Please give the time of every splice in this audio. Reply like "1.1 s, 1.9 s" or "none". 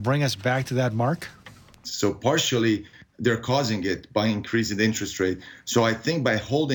1.8 s